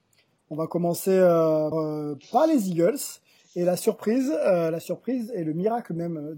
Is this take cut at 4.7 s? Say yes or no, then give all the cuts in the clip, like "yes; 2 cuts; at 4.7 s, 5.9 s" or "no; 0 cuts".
no; 1 cut; at 1.7 s